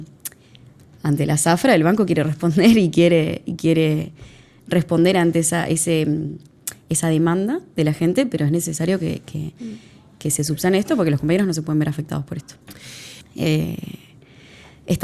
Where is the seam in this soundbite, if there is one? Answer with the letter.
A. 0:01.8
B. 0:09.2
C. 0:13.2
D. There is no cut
C